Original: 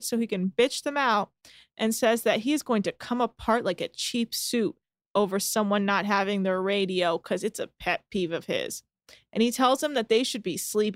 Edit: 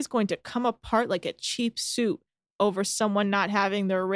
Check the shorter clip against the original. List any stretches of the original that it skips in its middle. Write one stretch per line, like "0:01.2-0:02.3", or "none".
none

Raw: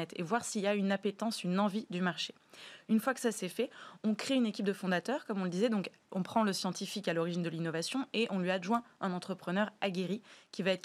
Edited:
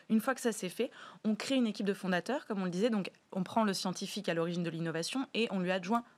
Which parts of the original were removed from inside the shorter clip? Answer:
none

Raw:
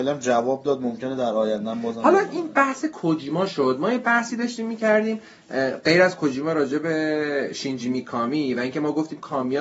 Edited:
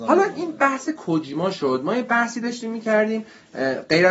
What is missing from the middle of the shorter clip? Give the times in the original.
none

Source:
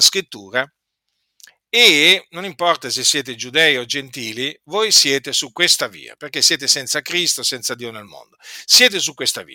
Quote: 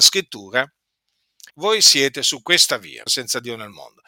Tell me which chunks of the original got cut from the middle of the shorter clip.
0:01.5-0:04.6
0:06.2-0:07.4

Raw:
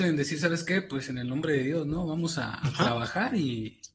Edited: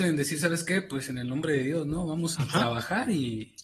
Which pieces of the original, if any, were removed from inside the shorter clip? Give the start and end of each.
0:02.4-0:02.6

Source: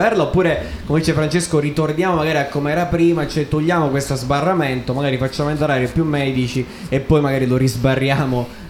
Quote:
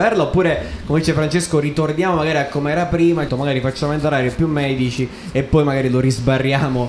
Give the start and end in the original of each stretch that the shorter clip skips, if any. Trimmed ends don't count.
0:03.3-0:04.9

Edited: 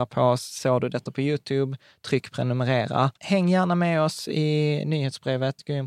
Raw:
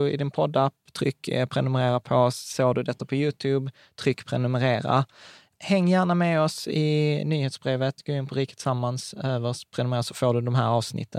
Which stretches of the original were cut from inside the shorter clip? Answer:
0:05.1-0:05.6

